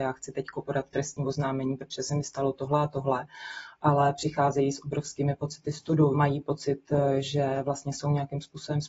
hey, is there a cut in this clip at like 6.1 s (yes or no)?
yes